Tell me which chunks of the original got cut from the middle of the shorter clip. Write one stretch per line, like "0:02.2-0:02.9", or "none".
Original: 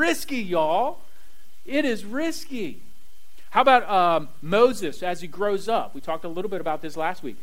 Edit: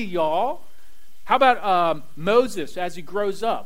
0:01.6-0:03.5